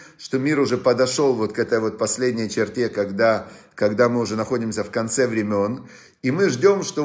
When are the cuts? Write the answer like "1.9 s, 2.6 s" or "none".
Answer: none